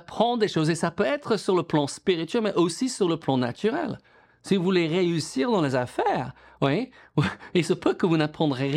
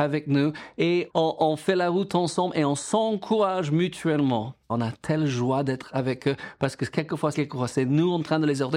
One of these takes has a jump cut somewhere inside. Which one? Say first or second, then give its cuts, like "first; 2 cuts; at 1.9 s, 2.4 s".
second; 3 cuts; at 1.1 s, 4.7 s, 7.3 s